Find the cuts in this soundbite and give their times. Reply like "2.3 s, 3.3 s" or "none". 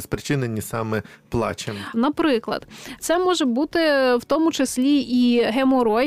1.9 s, 3.0 s